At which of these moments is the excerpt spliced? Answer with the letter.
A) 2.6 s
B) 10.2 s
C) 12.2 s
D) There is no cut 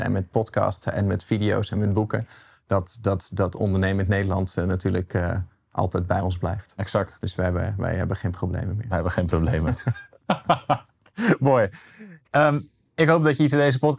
C